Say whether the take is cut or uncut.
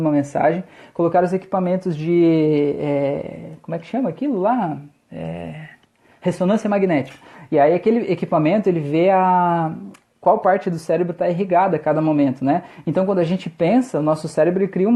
uncut